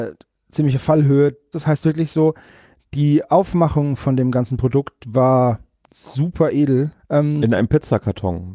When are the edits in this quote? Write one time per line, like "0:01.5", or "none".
0:01.5
0:07.0